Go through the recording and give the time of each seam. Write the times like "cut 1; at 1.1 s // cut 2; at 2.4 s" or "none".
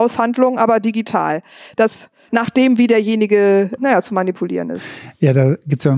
cut 1; at 2.3 s // cut 2; at 3.8 s

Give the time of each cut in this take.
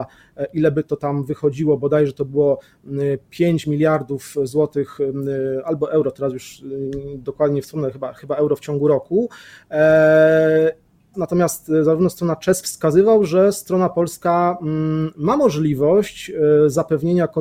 cut 1; at 11.1 s // cut 2; at 12.6 s

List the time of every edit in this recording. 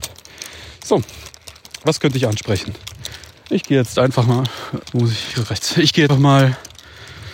cut 1; at 4.8 s // cut 2; at 6.1 s

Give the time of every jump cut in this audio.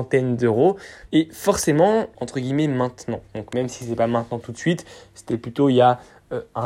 cut 1; at 1.1 s // cut 2; at 2.1 s

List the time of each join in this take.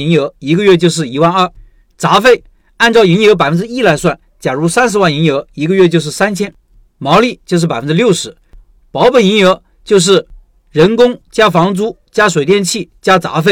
none

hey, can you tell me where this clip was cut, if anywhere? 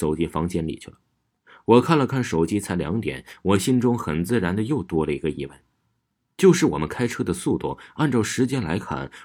none

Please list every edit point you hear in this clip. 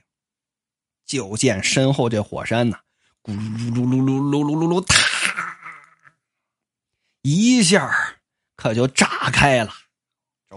none

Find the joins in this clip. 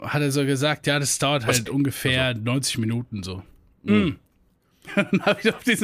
cut 1; at 4.9 s

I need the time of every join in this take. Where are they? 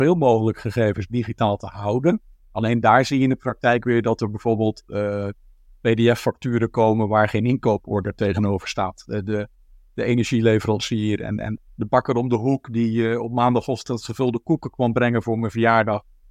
cut 1; at 2.4 s // cut 2; at 11.6 s

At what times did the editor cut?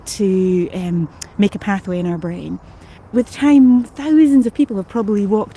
cut 1; at 3.0 s

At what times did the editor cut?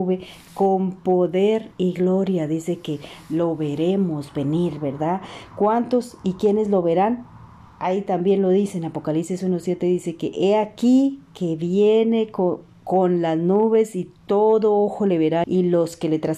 cut 1; at 15.4 s

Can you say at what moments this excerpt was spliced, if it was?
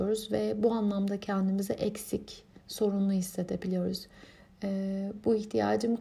cut 1; at 2.6 s

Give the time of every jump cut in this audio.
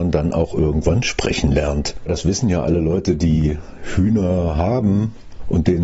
none

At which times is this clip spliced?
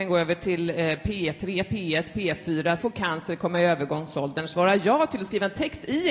cut 1; at 2.8 s

